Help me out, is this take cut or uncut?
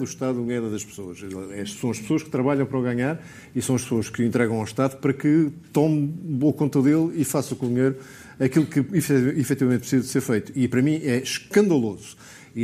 uncut